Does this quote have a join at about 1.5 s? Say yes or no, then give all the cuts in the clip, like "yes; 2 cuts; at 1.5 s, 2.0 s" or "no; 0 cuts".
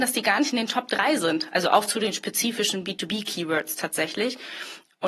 no; 0 cuts